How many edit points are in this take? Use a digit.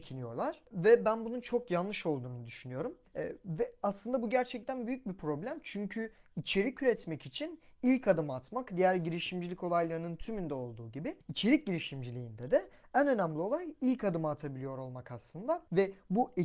0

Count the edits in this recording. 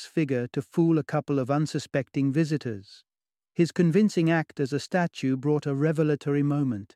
0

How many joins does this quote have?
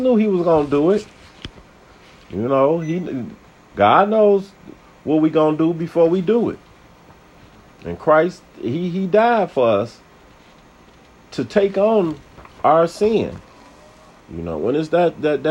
1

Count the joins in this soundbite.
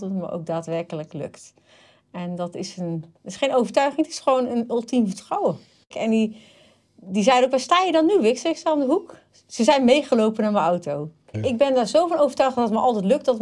2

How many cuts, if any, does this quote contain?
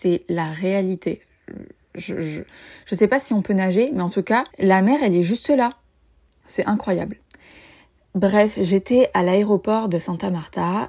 1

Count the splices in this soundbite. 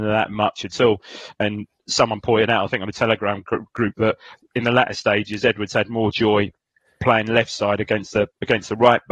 1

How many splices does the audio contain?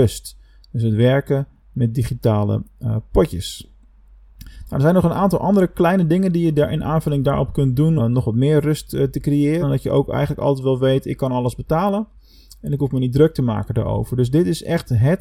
2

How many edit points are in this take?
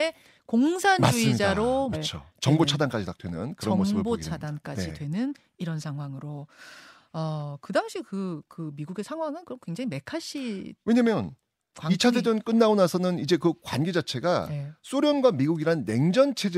1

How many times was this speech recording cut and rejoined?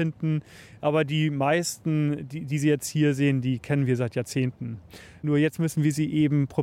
0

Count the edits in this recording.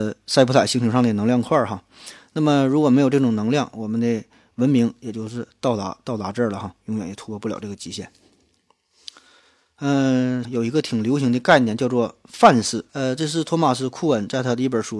2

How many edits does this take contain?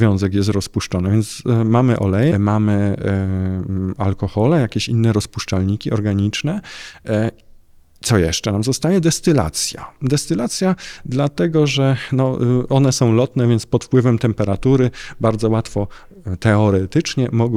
1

